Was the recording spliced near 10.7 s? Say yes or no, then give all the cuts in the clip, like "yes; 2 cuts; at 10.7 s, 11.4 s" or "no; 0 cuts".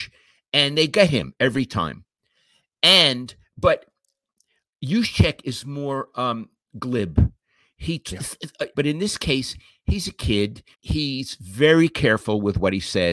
yes; 2 cuts; at 8.7 s, 10.7 s